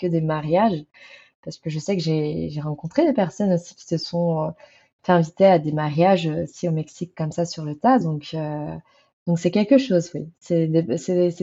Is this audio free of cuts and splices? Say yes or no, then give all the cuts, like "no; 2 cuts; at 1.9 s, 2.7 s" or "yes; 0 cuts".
yes; 0 cuts